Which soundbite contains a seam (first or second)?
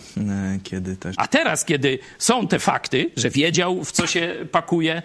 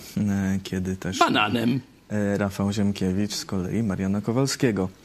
first